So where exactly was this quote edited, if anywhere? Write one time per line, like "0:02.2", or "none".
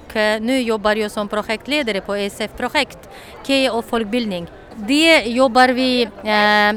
none

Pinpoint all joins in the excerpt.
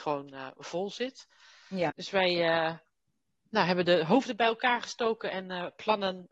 0:01.9

